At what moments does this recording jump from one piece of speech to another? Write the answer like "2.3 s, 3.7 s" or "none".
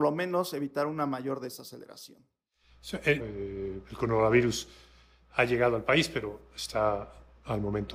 3.2 s